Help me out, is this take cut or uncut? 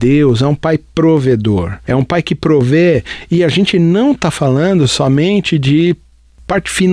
uncut